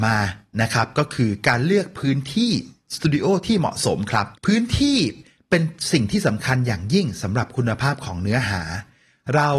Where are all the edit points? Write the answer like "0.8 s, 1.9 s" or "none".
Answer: 4.4 s